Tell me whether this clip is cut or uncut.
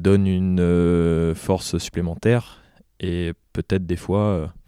uncut